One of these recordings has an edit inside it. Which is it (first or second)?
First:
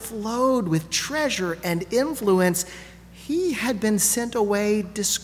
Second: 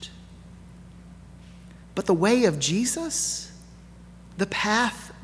second